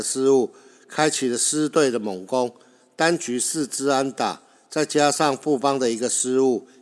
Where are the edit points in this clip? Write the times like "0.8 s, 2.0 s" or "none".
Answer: none